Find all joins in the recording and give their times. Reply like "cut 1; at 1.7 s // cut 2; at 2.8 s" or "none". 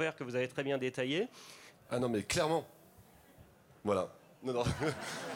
cut 1; at 1.7 s